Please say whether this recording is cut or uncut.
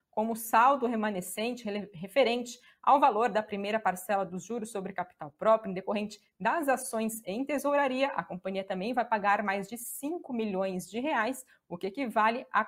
uncut